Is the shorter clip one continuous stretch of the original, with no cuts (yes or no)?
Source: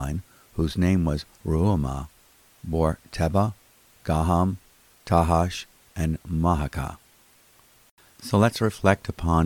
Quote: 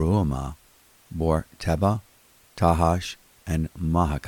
no